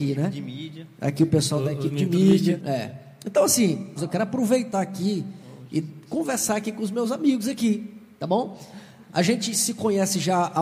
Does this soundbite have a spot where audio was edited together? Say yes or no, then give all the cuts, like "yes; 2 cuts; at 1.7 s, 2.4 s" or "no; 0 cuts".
yes; 2 cuts; at 2.6 s, 4.0 s